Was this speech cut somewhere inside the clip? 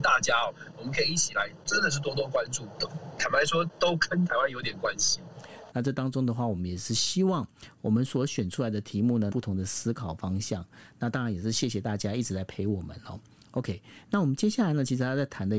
yes; 2 cuts; at 5.7 s, 9.3 s

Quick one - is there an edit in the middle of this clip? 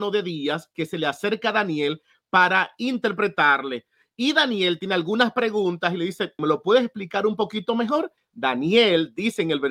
yes; 2 cuts; at 6.4 s, 8.2 s

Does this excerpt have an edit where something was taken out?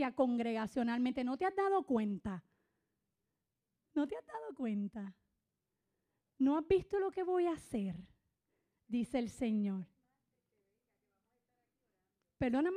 no; 0 cuts

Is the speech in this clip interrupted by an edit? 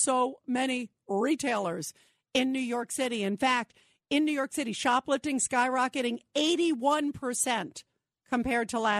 no; 0 cuts

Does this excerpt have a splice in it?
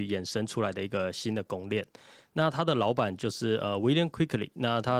no; 0 cuts

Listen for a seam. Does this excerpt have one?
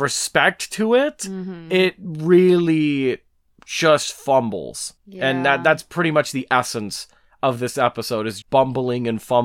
yes; 2 cuts; at 5.0 s, 8.4 s

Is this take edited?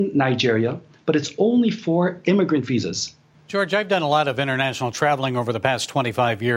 no; 0 cuts

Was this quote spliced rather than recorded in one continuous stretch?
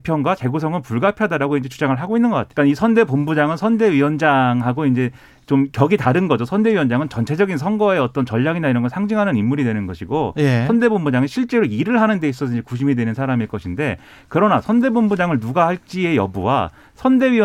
yes; 1 cut; at 2.5 s

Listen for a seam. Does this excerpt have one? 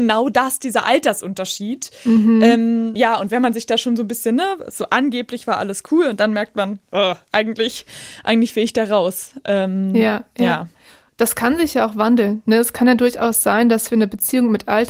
no; 0 cuts

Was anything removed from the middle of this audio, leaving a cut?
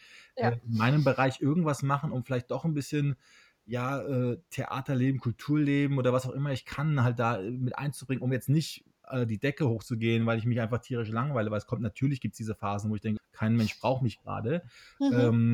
yes; 1 cut; at 13.2 s

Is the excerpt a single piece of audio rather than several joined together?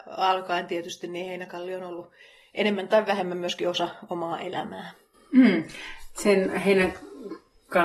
yes; 0 cuts

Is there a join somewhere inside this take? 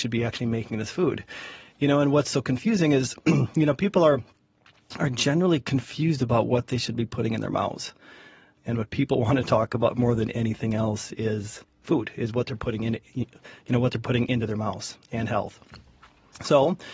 yes; 1 cut; at 8.6 s

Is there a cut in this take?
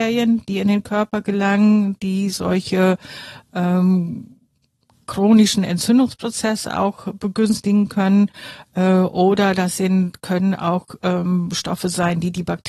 no; 0 cuts

